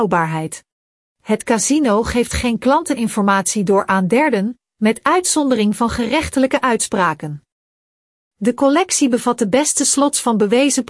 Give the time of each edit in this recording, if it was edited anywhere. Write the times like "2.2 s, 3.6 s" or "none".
1.1 s, 8.1 s